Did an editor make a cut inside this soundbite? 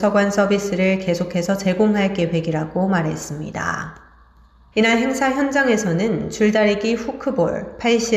yes; 1 cut; at 4.7 s

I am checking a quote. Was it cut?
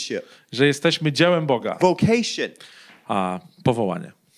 yes; 1 cut; at 1.8 s

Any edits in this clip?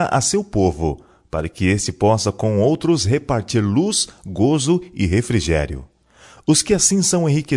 no; 0 cuts

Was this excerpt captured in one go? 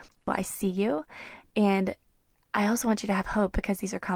yes; 0 cuts

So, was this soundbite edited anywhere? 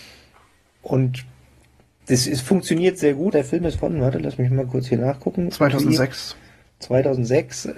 yes; 1 cut; at 3.3 s

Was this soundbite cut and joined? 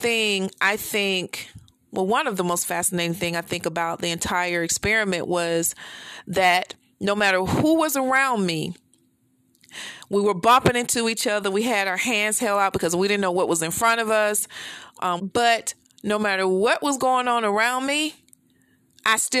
yes; 1 cut; at 15.2 s

